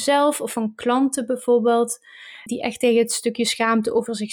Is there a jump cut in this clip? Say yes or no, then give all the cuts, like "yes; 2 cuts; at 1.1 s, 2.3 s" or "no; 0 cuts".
yes; 1 cut; at 2.5 s